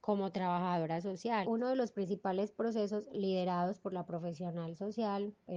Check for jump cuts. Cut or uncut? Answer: cut